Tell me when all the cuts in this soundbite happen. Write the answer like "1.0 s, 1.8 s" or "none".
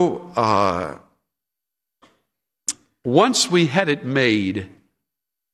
none